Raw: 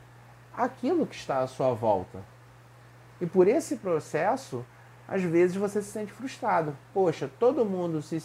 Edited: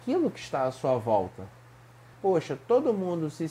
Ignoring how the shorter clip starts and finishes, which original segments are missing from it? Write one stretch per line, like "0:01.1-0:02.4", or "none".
0:02.9-0:06.9